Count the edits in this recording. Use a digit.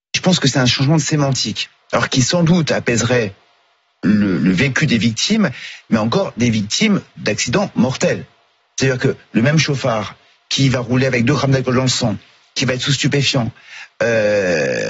0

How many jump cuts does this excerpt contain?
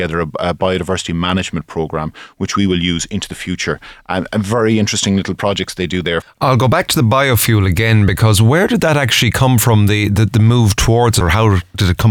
2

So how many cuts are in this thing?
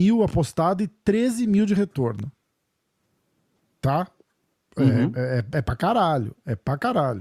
1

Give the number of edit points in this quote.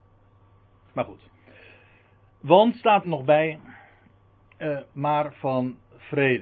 2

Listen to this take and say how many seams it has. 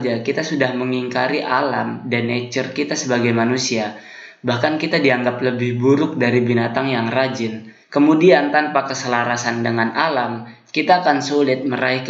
1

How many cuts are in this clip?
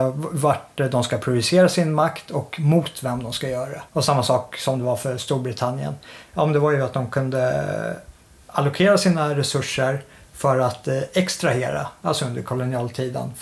2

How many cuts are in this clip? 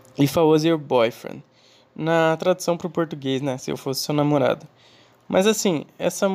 0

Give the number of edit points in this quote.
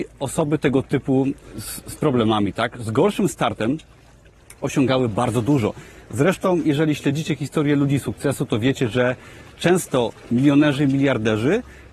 0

